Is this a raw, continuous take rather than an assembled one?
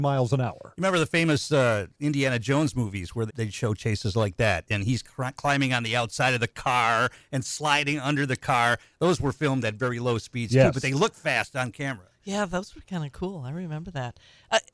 no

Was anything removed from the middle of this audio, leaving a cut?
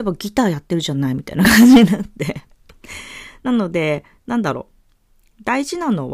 no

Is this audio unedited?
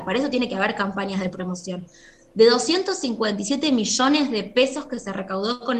yes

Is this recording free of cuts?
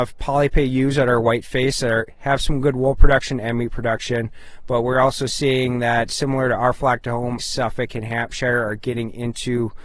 no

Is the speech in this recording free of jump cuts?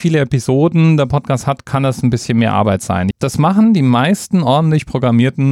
no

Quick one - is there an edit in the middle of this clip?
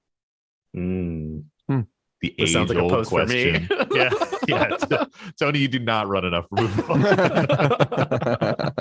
no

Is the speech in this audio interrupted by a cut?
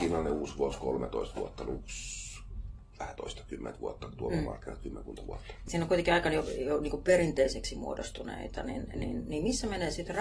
no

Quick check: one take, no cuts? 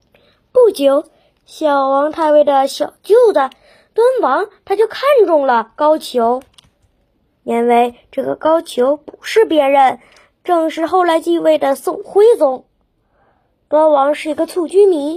yes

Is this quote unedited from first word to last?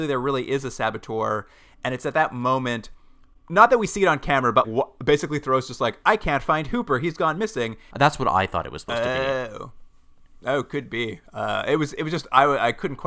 no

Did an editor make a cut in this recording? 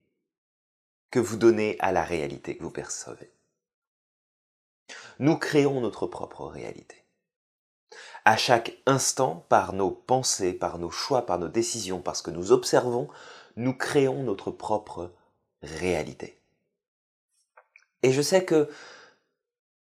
no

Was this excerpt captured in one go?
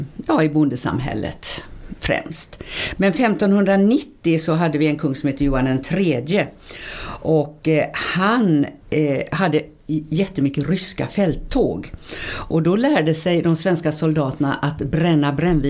no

